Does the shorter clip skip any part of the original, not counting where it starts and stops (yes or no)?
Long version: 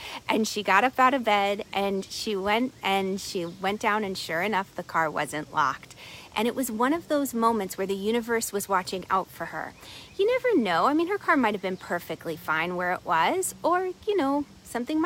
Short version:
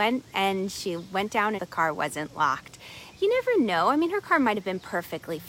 yes